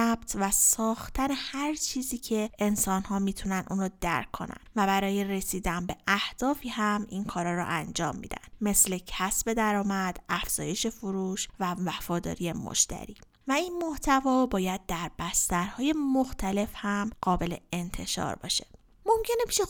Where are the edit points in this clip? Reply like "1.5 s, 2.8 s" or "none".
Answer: none